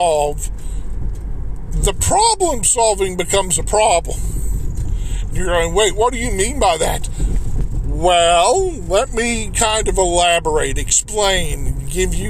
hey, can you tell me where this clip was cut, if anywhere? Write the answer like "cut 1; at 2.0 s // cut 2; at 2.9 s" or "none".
none